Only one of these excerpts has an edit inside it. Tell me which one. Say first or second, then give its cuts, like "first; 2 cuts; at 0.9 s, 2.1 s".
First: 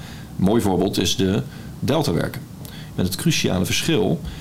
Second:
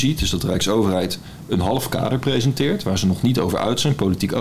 first; 1 cut; at 2.9 s